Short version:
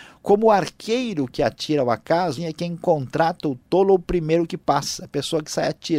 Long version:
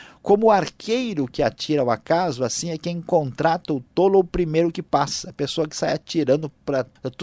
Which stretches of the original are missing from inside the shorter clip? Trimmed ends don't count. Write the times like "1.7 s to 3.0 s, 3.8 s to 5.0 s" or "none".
2.4 s to 2.6 s